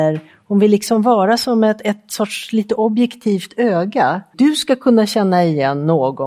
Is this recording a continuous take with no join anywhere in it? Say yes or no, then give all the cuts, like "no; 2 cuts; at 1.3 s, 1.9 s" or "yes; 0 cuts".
no; 1 cut; at 4.3 s